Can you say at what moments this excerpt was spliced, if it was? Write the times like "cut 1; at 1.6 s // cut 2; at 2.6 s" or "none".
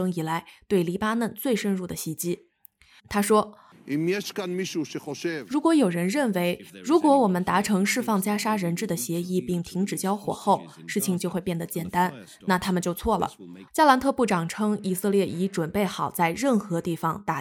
cut 1; at 3.0 s // cut 2; at 13.7 s